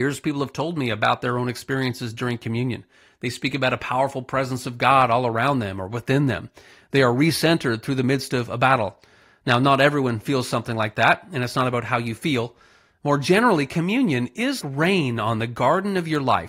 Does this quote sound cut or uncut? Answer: cut